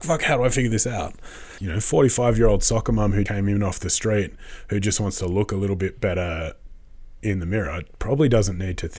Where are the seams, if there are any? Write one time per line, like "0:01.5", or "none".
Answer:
0:01.6
0:03.3